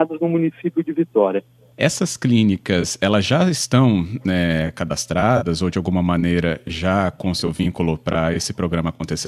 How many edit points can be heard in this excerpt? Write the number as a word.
one